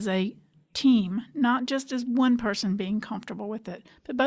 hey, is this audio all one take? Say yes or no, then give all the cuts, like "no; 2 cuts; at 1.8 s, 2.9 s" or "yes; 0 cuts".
yes; 0 cuts